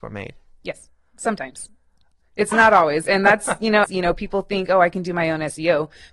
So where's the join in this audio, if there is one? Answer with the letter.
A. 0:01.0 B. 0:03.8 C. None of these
B